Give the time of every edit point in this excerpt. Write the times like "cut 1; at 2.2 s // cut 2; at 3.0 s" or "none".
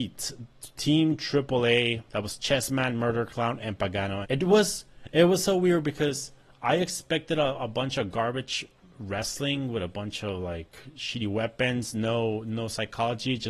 cut 1; at 4.2 s